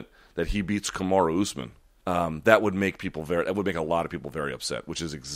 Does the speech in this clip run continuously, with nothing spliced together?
no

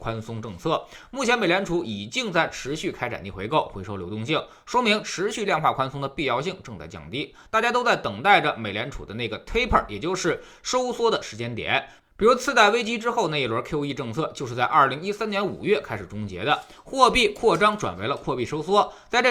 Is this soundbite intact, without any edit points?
yes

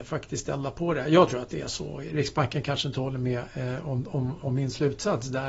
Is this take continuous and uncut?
no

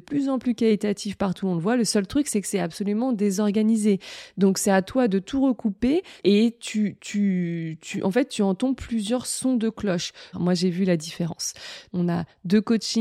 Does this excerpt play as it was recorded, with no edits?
no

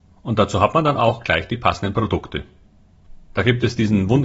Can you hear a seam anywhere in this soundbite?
no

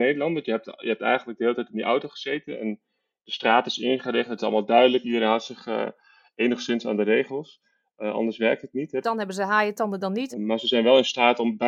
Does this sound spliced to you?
yes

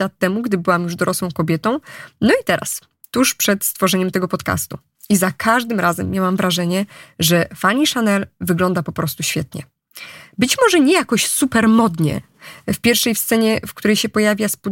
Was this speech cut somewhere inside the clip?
no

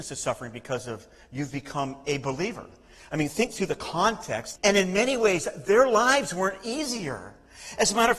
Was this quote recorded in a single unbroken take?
no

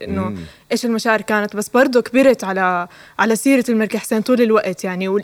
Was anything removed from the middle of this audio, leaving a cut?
no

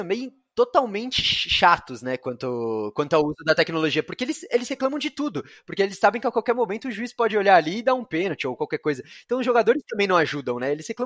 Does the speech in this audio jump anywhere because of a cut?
no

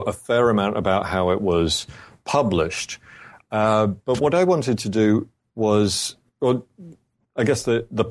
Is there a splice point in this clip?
no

